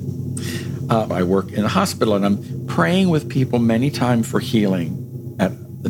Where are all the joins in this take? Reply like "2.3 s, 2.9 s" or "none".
1.1 s